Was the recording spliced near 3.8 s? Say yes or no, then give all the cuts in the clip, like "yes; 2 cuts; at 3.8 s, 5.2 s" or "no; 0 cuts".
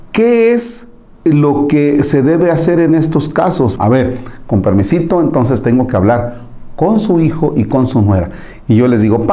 yes; 1 cut; at 3.8 s